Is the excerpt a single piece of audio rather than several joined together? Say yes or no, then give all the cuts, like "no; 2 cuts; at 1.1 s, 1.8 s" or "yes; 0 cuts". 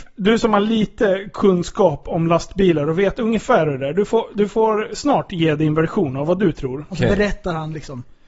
no; 1 cut; at 6.9 s